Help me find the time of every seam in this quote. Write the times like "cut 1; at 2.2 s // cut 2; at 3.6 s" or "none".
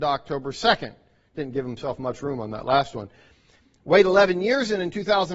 none